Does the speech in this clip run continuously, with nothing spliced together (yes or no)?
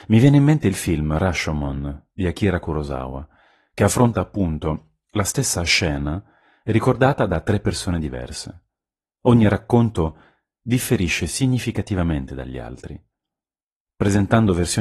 yes